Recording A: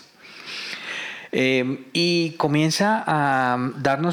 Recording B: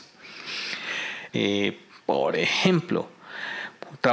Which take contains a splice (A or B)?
B